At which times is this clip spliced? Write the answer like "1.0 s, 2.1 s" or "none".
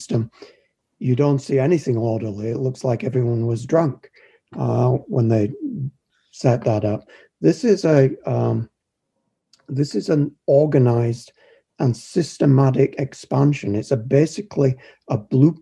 none